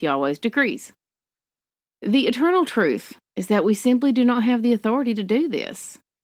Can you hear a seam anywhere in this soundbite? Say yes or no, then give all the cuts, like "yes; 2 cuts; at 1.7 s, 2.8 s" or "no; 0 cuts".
no; 0 cuts